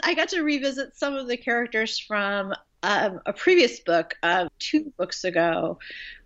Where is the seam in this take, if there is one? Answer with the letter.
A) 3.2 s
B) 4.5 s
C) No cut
B